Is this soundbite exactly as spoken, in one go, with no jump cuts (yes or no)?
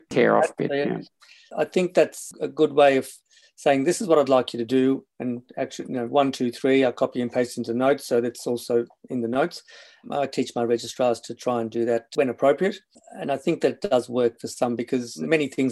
yes